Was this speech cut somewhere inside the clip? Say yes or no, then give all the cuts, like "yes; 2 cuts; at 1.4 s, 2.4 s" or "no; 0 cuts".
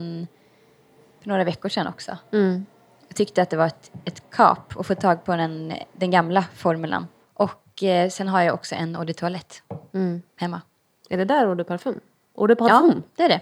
no; 0 cuts